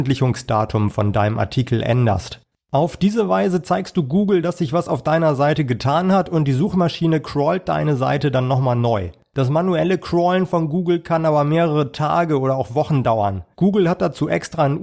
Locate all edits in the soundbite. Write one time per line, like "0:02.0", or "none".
0:13.5